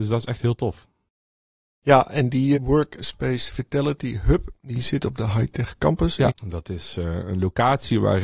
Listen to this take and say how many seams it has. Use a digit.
2